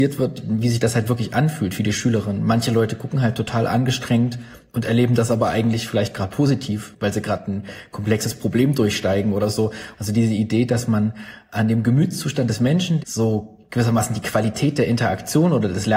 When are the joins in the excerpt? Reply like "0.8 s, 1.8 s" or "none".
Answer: 9.9 s, 13.0 s